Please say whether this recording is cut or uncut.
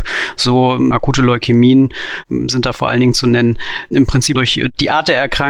cut